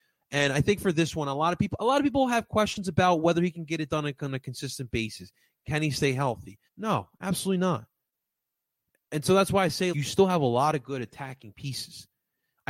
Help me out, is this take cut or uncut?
cut